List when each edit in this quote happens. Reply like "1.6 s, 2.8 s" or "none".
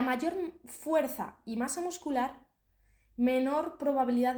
none